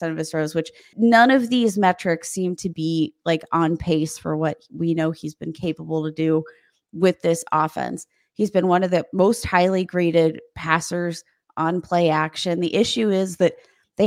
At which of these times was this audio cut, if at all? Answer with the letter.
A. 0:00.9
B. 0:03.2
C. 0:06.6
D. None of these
A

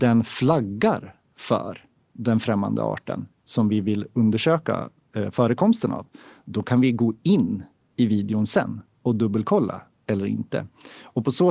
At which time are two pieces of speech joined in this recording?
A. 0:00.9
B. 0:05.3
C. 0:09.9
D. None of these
C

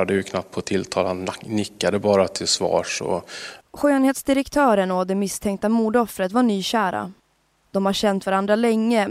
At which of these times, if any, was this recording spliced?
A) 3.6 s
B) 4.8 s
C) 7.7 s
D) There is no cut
A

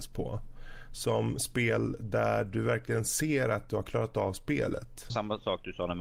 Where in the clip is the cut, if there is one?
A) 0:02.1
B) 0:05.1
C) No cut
B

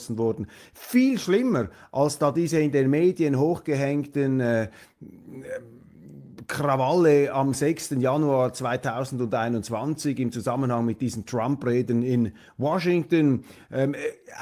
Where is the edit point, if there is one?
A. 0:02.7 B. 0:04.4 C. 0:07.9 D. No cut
D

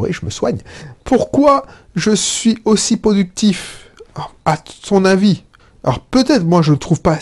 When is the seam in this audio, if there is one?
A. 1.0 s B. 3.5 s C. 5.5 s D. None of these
A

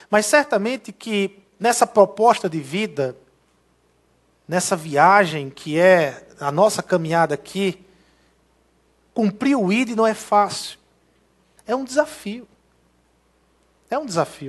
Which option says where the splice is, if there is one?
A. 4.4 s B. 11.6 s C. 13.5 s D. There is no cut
B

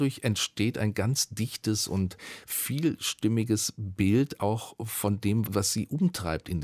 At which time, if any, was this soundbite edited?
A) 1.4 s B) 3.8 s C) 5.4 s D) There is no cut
C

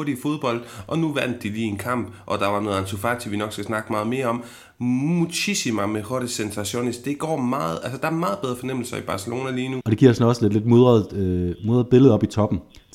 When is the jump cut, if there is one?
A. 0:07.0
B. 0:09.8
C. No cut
B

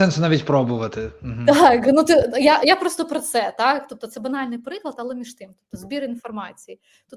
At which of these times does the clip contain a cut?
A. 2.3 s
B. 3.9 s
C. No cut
C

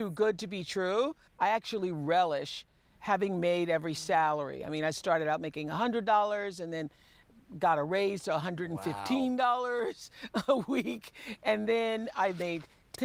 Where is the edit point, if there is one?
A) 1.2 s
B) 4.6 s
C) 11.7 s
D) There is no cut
D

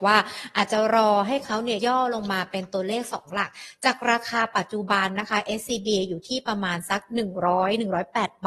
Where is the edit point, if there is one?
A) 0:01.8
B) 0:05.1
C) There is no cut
A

